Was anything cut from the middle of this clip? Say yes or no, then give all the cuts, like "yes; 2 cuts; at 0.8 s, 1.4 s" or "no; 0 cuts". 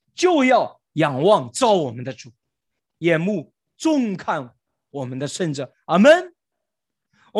no; 0 cuts